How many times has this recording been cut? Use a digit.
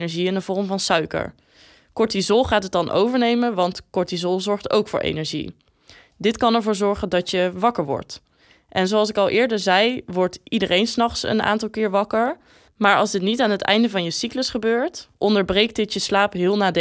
1